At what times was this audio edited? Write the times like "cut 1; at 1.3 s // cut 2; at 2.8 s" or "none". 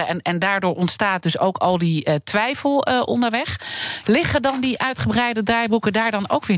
cut 1; at 4.0 s